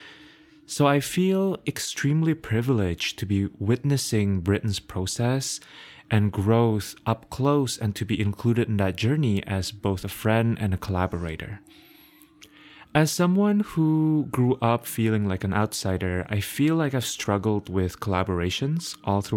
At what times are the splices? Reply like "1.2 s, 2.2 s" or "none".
none